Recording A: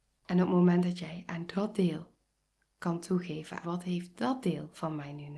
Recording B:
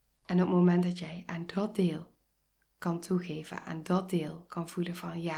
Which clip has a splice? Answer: A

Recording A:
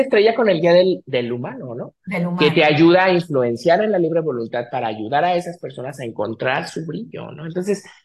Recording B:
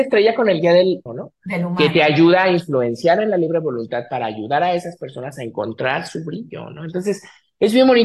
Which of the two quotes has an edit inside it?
B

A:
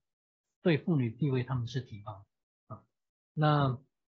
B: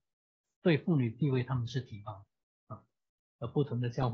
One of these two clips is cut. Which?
B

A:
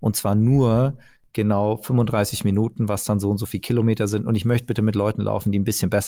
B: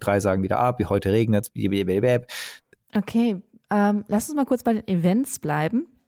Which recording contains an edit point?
B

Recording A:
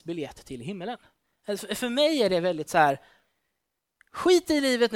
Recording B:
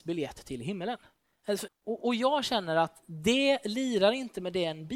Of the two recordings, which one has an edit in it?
B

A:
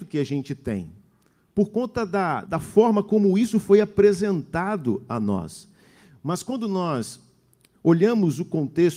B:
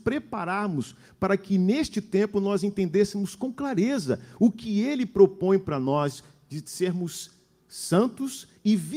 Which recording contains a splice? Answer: A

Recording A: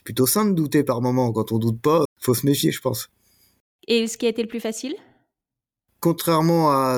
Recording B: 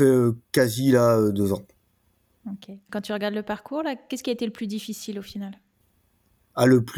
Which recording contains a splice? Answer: A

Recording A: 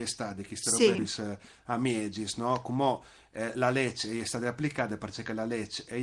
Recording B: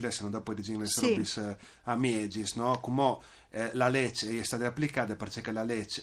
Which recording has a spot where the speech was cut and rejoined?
A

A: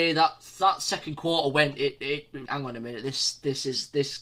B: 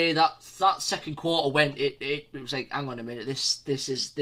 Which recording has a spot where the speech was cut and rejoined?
A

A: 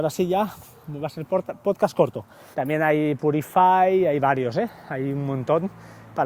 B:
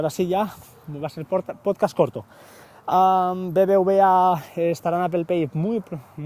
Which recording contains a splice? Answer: A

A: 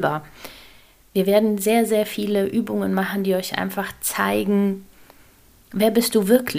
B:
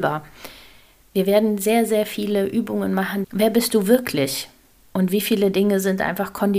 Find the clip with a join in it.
B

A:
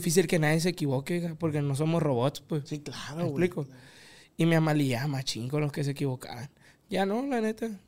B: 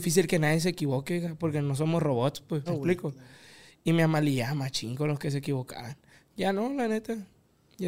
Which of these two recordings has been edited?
B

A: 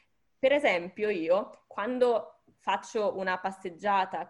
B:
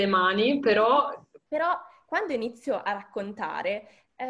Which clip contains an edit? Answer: B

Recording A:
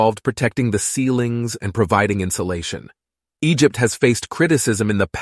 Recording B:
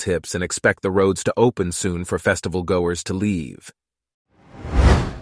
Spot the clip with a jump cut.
A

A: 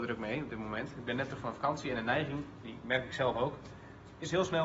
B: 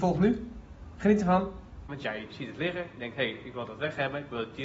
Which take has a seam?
B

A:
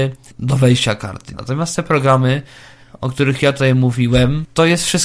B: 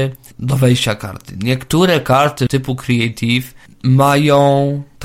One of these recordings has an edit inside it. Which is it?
A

